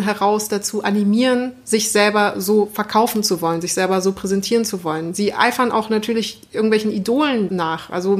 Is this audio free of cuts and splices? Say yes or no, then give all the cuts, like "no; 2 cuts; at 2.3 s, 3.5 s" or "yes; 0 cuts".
yes; 0 cuts